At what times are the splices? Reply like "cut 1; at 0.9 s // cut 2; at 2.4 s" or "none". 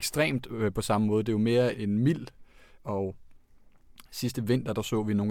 cut 1; at 1.7 s // cut 2; at 2.8 s

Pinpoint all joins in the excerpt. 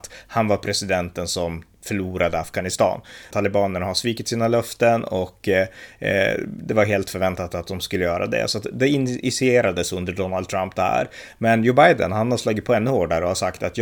cut 1; at 3.3 s

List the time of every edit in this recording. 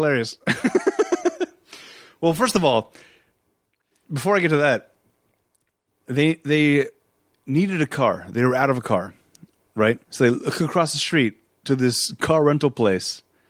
cut 1; at 10.0 s

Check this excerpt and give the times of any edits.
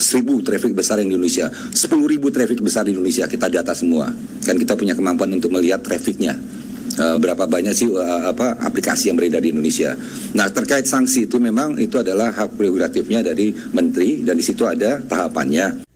cut 1; at 7.1 s

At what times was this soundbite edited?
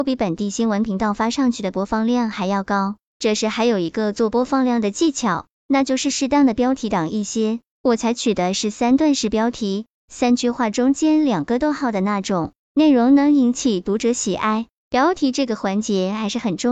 none

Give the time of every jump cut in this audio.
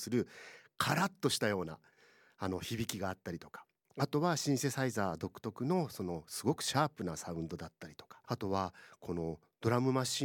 cut 1; at 8.2 s

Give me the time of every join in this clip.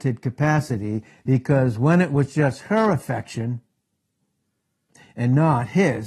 none

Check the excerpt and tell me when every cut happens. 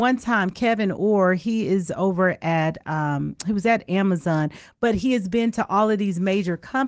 none

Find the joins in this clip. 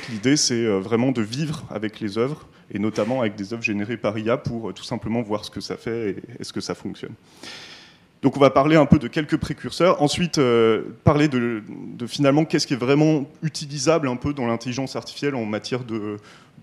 none

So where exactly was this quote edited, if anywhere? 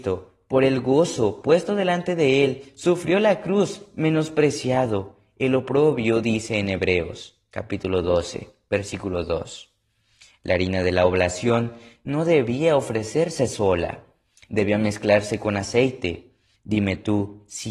cut 1; at 16.6 s

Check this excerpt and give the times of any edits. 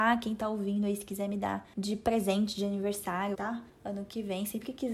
cut 1; at 3.3 s

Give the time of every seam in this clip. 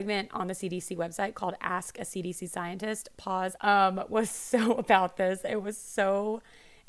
cut 1; at 3.6 s

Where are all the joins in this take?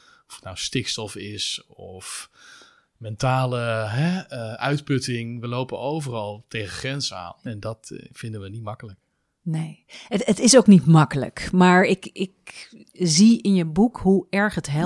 cut 1; at 7.5 s

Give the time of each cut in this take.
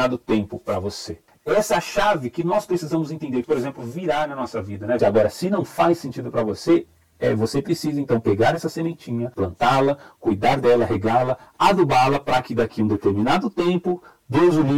cut 1; at 1.3 s // cut 2; at 3.4 s // cut 3; at 5.0 s

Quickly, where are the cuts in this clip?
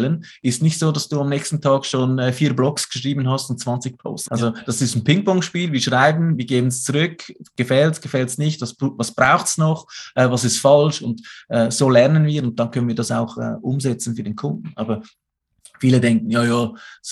cut 1; at 4.3 s

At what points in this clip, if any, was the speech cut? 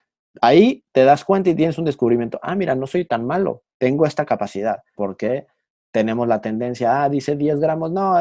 cut 1; at 5.0 s

